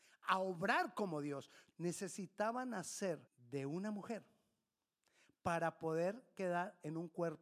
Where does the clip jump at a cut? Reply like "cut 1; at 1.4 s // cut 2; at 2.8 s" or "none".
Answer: cut 1; at 1.7 s // cut 2; at 3.3 s